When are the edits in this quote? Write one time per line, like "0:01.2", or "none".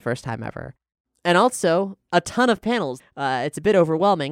0:03.0